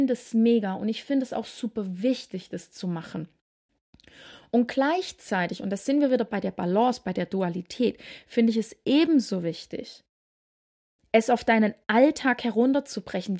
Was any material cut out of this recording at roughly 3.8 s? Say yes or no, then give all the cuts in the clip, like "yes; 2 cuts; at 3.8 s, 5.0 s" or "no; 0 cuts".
no; 0 cuts